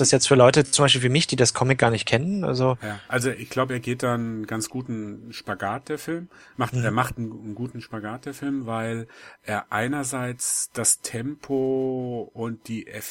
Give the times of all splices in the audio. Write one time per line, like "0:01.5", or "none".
none